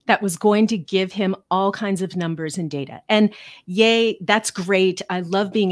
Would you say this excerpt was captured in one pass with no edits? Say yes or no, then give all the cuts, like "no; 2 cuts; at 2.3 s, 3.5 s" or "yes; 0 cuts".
yes; 0 cuts